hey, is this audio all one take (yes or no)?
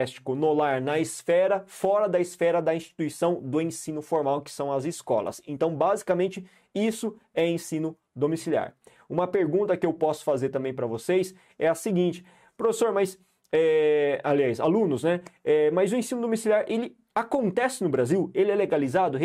yes